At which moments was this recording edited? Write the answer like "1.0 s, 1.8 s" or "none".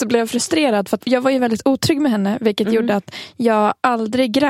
1.0 s